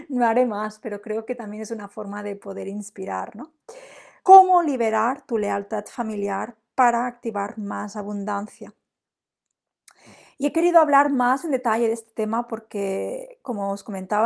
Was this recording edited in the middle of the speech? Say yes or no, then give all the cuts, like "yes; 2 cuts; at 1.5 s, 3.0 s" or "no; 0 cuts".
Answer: yes; 1 cut; at 4.2 s